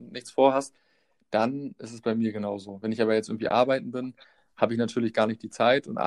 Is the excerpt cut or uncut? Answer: uncut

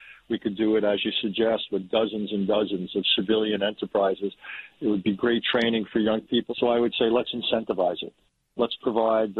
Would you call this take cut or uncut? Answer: cut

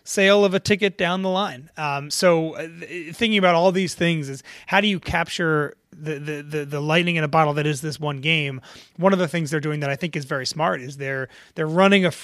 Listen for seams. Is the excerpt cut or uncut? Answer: uncut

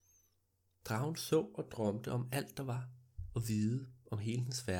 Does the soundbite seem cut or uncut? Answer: uncut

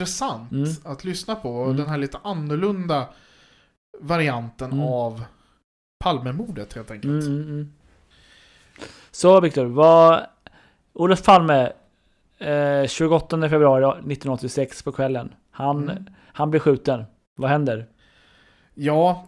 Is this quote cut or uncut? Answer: uncut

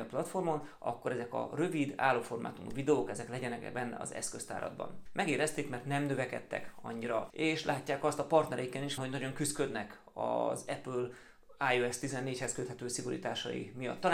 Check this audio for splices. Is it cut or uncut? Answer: cut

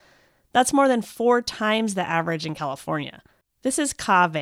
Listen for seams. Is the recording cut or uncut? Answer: cut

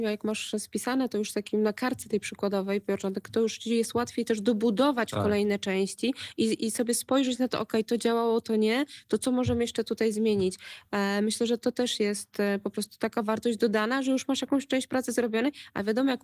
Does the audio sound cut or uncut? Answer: uncut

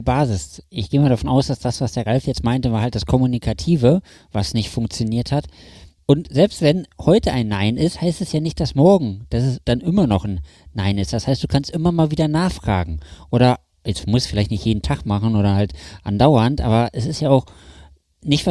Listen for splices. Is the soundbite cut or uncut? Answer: cut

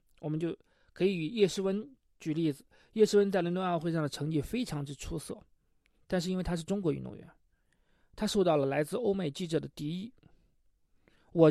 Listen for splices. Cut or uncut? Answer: uncut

